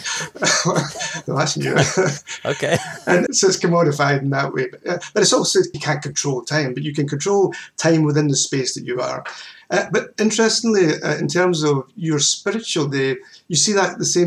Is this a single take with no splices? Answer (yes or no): no